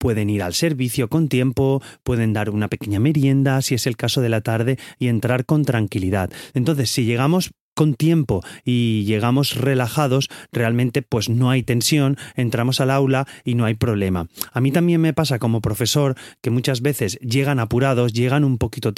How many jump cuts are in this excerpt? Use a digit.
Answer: 1